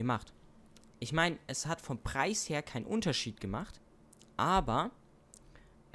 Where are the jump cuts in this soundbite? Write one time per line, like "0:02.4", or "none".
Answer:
none